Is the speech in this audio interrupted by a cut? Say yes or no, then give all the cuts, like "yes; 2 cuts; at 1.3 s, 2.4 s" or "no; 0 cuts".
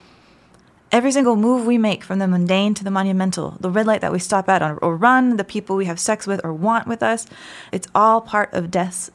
yes; 1 cut; at 7.7 s